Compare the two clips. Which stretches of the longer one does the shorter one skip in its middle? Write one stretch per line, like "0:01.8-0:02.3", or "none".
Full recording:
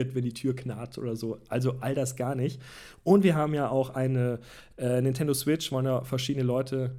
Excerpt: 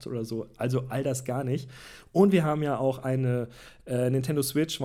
none